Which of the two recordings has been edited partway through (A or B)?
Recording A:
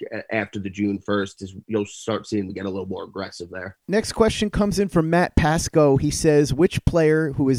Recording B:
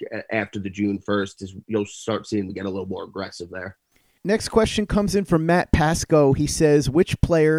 A